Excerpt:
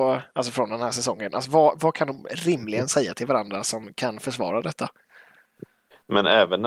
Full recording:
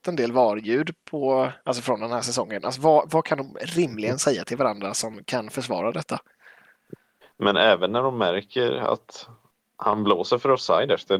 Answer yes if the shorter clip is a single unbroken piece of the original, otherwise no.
yes